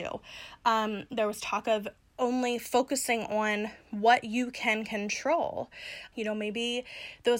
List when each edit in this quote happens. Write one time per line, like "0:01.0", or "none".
0:06.1